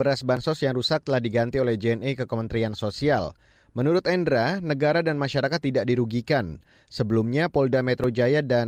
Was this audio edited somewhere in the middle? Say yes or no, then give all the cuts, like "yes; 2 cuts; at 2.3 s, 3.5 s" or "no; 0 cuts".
no; 0 cuts